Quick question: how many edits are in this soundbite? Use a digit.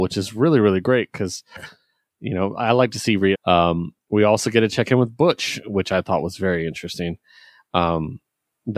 1